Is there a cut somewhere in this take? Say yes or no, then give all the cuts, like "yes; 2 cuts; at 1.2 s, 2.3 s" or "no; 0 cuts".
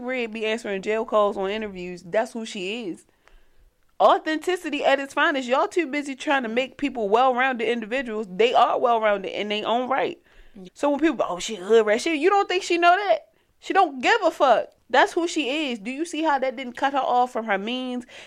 yes; 2 cuts; at 10.7 s, 14.8 s